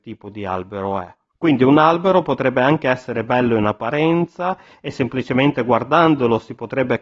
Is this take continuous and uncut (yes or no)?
no